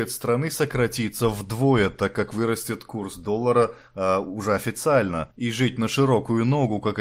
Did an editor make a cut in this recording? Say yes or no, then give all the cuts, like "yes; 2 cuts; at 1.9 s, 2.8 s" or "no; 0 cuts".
no; 0 cuts